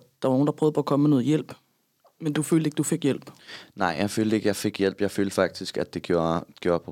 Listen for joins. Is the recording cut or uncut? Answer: uncut